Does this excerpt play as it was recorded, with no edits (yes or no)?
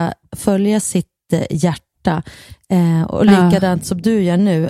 yes